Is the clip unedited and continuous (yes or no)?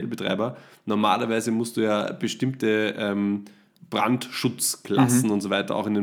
no